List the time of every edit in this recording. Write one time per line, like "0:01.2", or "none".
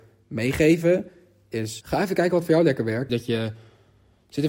0:01.8
0:03.1

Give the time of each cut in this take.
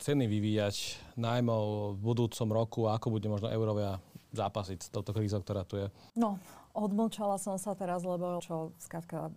0:06.1
0:08.4

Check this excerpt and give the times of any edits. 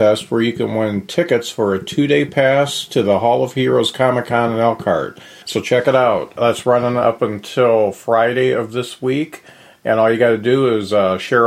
0:05.4

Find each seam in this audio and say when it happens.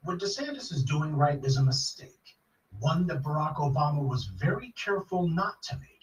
0:01.4

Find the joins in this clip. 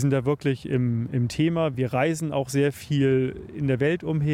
none

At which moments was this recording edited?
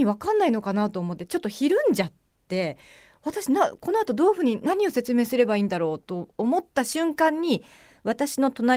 none

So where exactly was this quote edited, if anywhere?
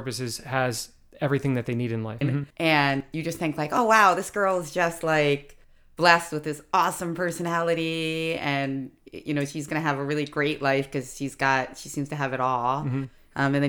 0:02.2

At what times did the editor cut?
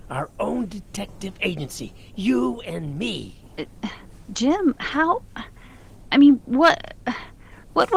none

